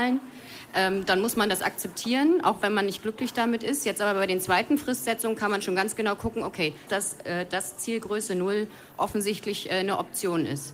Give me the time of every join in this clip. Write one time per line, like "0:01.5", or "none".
0:06.9